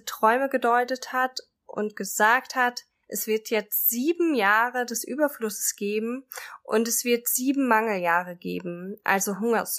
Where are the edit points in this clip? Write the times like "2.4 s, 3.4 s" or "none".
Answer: 3.0 s